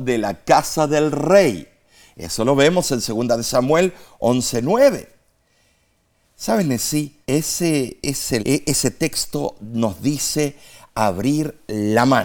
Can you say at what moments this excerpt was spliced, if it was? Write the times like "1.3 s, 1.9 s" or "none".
7.2 s, 8.4 s